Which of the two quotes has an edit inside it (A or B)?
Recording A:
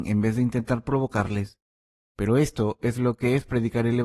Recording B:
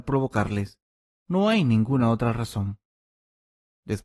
B